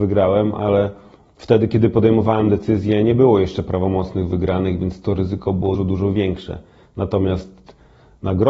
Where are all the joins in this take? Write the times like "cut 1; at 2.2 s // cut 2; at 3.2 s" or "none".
cut 1; at 5.8 s